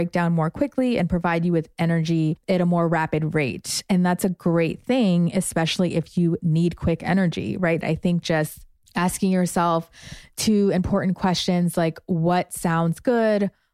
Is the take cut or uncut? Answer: cut